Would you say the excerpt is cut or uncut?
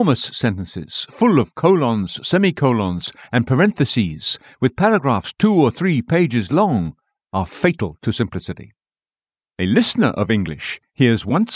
cut